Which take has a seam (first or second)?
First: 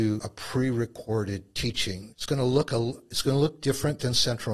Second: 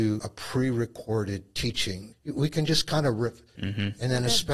second